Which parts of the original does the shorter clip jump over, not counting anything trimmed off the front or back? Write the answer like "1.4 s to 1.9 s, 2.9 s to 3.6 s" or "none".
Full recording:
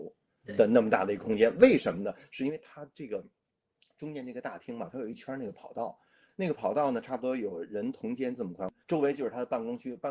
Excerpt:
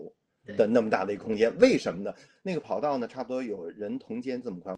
2.3 s to 6.2 s